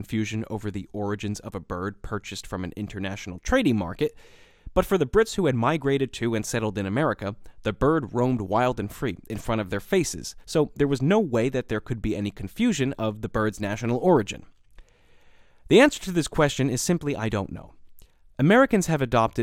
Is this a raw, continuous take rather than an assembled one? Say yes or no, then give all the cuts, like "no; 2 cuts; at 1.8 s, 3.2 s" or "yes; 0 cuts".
yes; 0 cuts